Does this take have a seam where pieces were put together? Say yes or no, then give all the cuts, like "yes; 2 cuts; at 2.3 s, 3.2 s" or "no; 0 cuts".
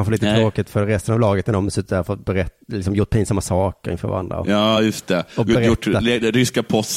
no; 0 cuts